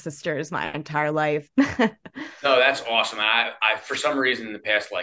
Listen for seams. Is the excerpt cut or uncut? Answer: cut